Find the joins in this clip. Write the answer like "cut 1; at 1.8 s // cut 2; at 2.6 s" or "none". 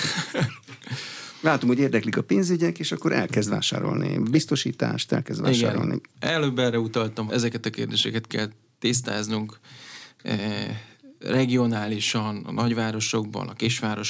cut 1; at 7.3 s // cut 2; at 11.2 s